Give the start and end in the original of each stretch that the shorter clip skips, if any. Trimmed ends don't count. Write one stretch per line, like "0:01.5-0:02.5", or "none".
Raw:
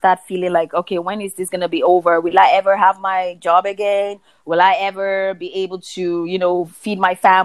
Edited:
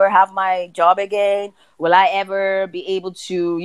none